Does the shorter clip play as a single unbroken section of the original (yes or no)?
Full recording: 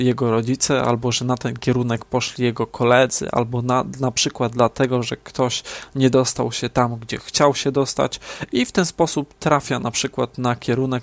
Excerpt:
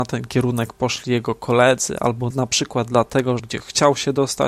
no